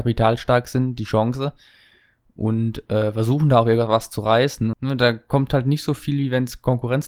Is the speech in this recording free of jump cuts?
no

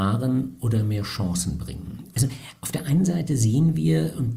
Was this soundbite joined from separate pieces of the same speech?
yes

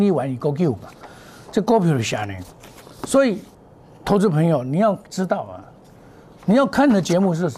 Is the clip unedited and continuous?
yes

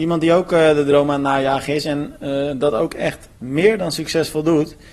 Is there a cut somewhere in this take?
yes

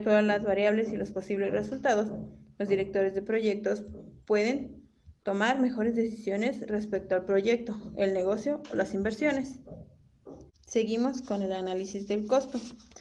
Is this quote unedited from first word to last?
no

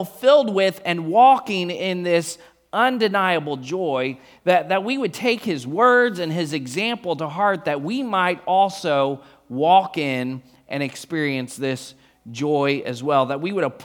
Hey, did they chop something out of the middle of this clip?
no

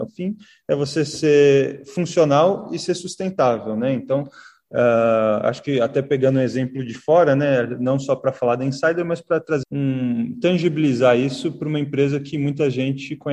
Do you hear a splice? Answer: yes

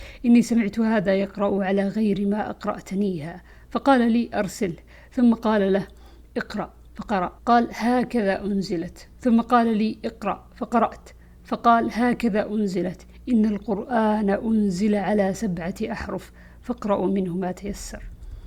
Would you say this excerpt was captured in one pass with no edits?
no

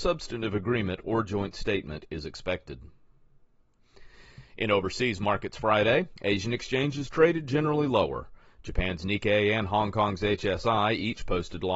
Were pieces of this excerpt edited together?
no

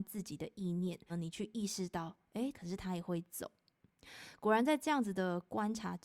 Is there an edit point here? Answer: yes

